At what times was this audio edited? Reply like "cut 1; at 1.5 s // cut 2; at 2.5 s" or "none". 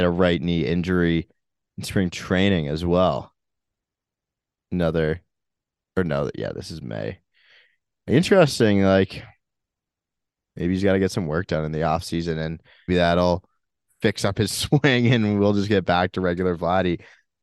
cut 1; at 12.9 s